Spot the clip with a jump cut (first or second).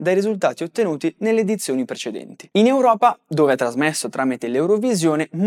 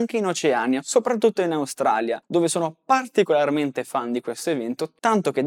first